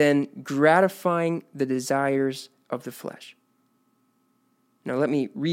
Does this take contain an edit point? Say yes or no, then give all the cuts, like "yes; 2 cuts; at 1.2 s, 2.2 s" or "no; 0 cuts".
no; 0 cuts